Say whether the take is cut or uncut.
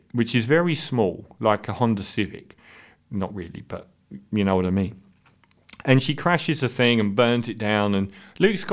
uncut